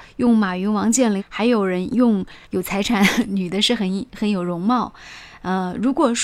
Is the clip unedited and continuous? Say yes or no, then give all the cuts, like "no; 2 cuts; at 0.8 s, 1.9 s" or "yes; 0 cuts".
no; 2 cuts; at 1.2 s, 2.4 s